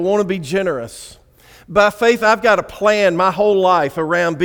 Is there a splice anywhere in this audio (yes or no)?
no